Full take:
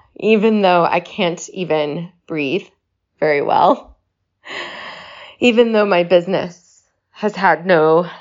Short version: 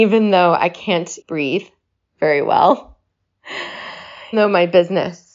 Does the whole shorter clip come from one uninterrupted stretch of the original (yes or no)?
no